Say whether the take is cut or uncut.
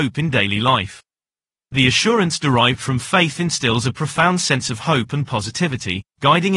uncut